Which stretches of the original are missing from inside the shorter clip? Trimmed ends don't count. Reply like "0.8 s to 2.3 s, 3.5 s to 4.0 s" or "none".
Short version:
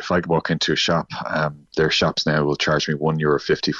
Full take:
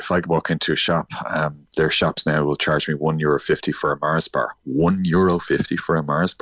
none